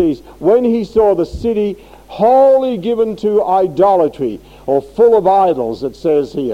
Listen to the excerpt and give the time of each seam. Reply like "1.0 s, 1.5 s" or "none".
none